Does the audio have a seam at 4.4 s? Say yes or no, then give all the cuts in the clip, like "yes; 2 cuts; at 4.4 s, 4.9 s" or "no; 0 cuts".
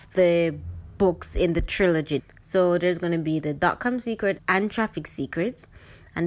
yes; 2 cuts; at 2.2 s, 4.4 s